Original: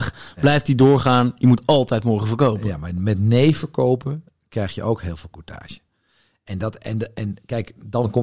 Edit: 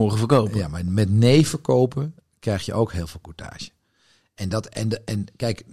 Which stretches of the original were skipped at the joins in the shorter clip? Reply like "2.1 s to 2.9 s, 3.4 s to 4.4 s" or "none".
none